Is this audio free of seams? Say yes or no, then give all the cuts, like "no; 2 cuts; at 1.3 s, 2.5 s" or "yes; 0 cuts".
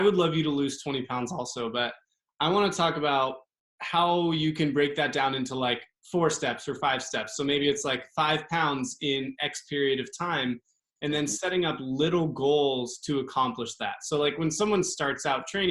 yes; 0 cuts